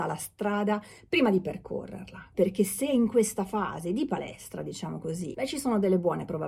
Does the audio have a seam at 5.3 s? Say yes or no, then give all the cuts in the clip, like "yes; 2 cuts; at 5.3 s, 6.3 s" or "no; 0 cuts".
yes; 2 cuts; at 2.3 s, 5.3 s